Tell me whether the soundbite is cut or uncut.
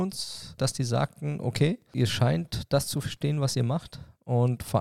uncut